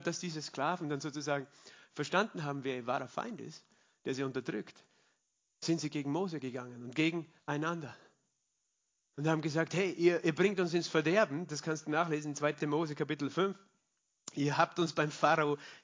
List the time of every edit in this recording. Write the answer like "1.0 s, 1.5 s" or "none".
none